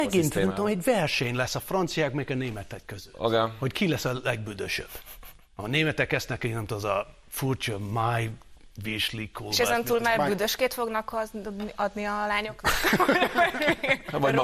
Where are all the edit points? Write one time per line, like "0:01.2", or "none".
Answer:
none